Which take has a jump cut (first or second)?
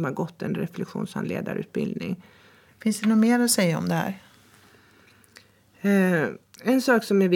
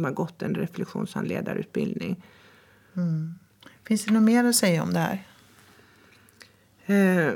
first